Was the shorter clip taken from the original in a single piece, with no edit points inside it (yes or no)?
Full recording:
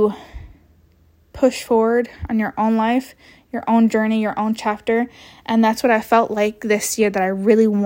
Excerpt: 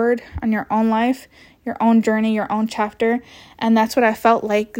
yes